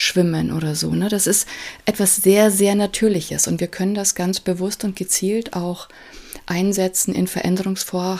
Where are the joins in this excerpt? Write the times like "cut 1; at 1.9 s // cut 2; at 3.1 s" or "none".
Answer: none